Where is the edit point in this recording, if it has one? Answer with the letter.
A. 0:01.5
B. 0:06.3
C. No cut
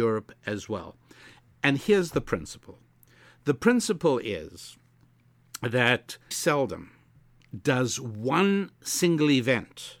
B